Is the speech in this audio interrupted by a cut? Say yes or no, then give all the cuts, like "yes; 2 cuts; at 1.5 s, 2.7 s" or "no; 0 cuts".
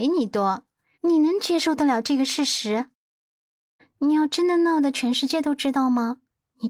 yes; 2 cuts; at 1.0 s, 3.8 s